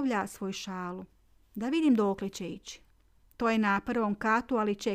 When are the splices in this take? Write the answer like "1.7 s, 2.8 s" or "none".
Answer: 3.3 s